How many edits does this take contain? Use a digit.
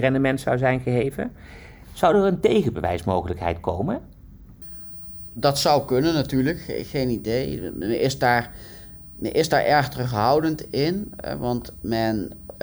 0